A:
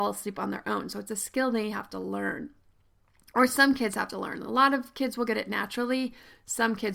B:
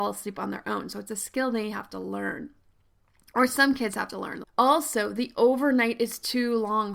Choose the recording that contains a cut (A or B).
B